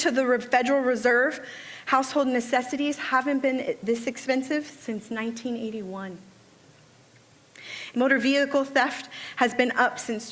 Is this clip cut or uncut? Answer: cut